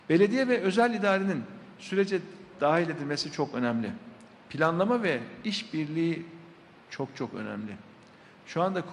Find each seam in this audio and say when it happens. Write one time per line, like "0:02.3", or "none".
none